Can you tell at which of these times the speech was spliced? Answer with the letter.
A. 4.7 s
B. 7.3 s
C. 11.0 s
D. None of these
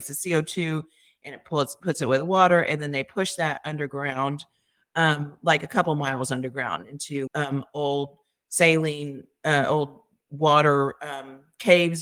B